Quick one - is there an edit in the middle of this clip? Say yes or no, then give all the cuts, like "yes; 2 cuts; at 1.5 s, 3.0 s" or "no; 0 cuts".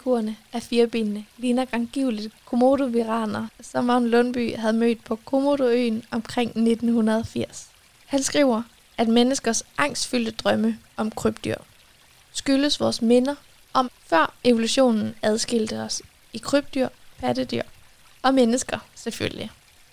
yes; 3 cuts; at 8.0 s, 13.8 s, 17.1 s